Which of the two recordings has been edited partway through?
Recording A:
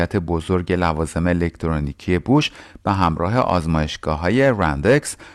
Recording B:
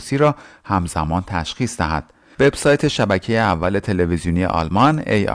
B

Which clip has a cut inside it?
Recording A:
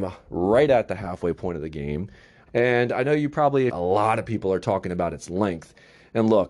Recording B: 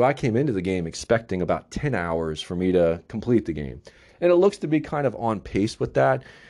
A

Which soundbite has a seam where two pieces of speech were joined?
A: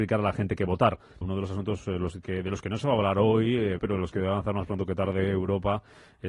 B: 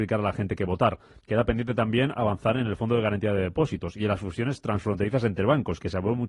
A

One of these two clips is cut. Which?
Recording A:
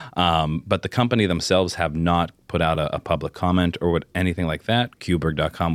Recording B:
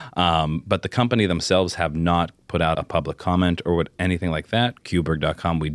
B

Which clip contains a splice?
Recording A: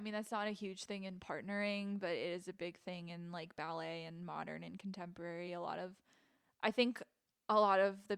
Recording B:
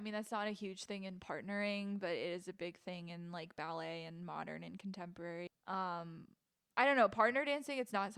B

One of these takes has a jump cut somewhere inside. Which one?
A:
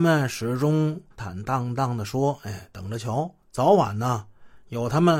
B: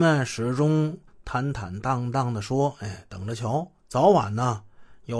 A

